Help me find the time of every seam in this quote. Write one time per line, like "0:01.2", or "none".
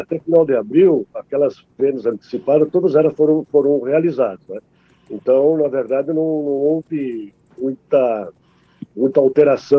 none